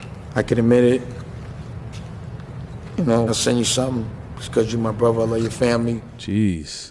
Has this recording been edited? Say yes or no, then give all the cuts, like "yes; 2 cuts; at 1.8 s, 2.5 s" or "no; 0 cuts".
yes; 1 cut; at 3.3 s